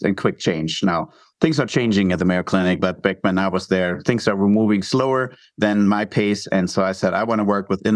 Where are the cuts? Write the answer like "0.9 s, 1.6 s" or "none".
none